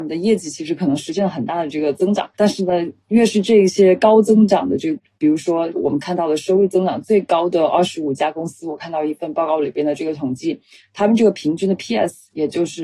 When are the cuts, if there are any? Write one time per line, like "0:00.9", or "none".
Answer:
0:02.3
0:05.2